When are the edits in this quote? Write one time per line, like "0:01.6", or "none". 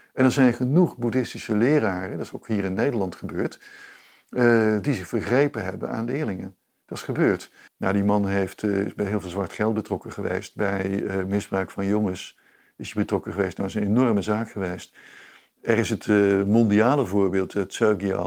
0:07.7